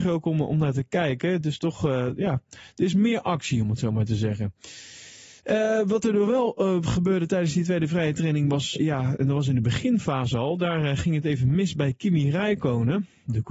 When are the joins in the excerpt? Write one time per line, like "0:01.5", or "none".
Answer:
0:05.4
0:08.7